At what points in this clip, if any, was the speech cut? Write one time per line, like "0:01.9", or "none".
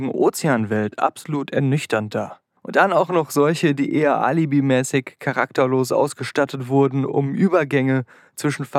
0:02.6